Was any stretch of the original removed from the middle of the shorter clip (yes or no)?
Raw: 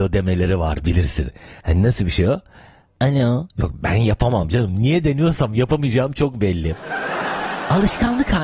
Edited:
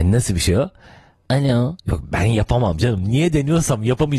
no